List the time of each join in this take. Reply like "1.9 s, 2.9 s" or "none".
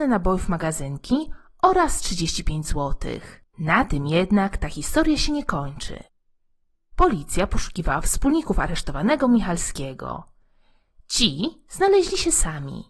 3.5 s